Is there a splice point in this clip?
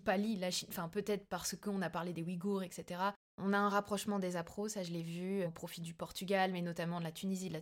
no; 0 cuts

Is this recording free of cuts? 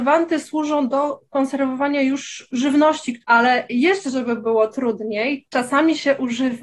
yes; 0 cuts

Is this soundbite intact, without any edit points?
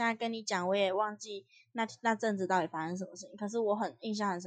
yes; 0 cuts

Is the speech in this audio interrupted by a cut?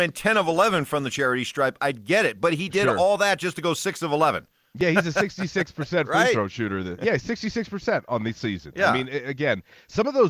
no; 0 cuts

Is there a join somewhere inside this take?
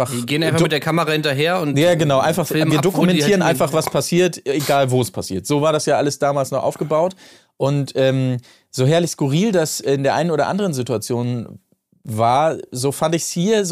no; 0 cuts

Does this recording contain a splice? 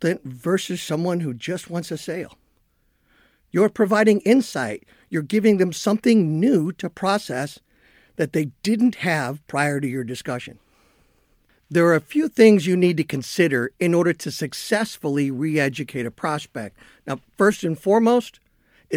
no; 0 cuts

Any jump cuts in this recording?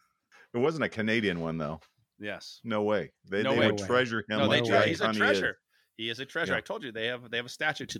no; 0 cuts

